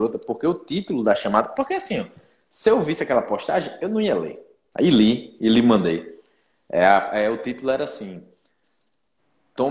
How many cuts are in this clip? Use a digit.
1